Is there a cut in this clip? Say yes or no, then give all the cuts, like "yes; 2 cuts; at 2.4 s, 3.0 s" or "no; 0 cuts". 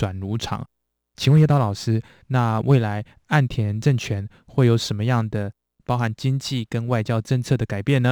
yes; 1 cut; at 2.2 s